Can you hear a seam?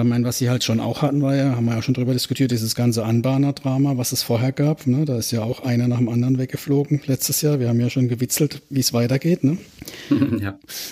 no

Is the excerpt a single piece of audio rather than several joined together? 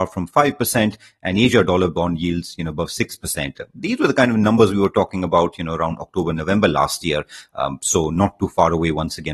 yes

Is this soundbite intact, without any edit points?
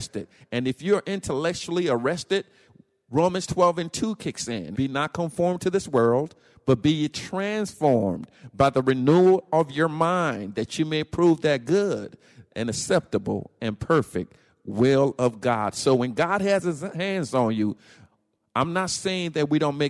no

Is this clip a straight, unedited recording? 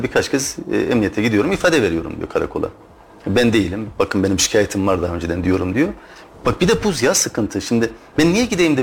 yes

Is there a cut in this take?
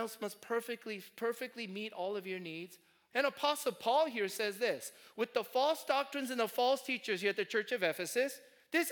yes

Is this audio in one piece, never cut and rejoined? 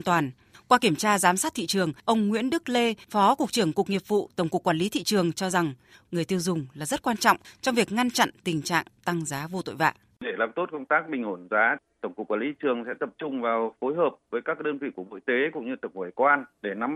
no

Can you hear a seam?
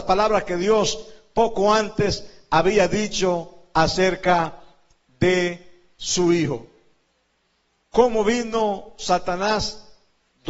no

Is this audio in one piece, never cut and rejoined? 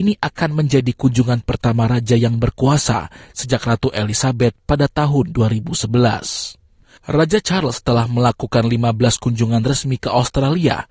no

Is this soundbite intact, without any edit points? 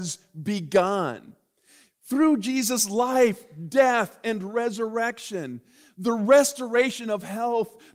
yes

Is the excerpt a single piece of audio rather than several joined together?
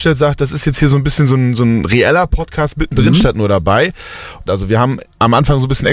no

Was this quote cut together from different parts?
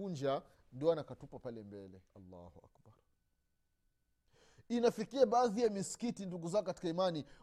yes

